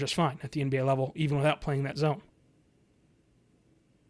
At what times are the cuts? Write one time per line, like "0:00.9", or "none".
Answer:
none

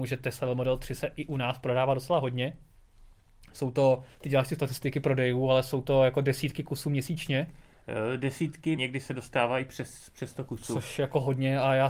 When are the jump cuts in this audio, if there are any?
0:04.1
0:08.8

